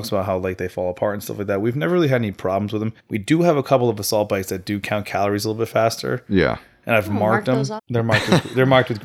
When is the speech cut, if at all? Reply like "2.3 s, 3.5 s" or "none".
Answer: 3.0 s, 7.8 s